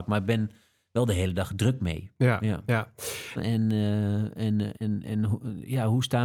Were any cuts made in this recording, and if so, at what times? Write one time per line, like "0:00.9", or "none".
0:03.4
0:04.7